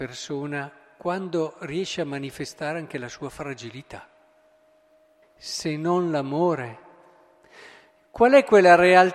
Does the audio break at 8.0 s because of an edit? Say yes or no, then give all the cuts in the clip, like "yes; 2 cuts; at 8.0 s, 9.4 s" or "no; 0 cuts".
no; 1 cut; at 5.2 s